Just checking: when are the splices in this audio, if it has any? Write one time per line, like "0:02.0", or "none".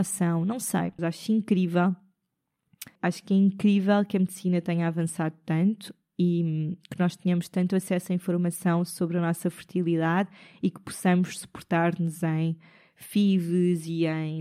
0:01.0
0:03.0